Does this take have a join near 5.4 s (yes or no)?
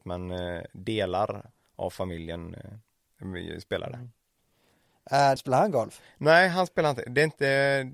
yes